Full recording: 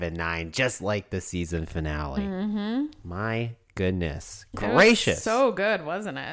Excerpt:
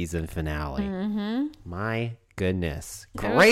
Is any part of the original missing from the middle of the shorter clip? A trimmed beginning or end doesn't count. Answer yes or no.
no